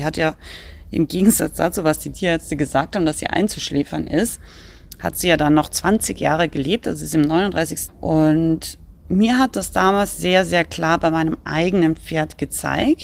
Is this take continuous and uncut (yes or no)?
no